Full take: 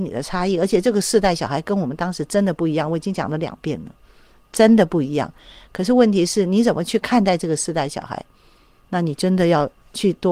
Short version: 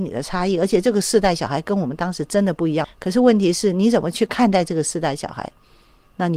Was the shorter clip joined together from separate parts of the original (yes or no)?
yes